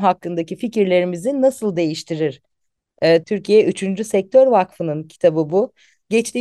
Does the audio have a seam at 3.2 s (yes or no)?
yes